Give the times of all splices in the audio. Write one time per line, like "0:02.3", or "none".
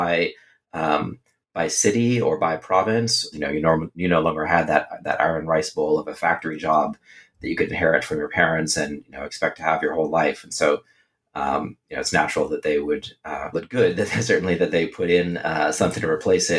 0:03.3
0:13.5